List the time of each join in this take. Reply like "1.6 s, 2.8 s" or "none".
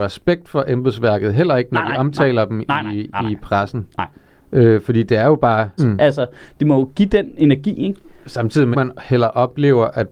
5.8 s, 8.7 s